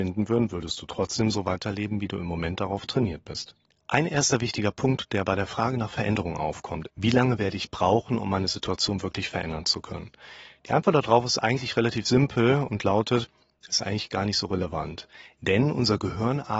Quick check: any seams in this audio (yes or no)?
yes